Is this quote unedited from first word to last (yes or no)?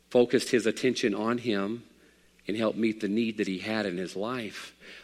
yes